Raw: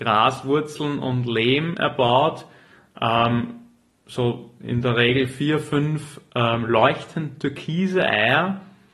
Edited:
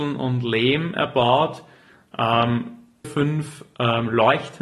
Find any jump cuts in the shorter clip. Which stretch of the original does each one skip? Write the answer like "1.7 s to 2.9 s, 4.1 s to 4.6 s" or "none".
3.9 s to 5.6 s